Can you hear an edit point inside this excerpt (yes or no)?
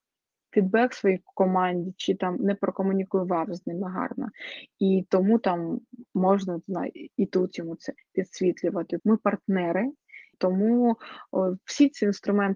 yes